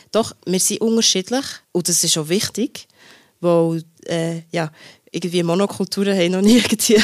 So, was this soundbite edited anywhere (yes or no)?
yes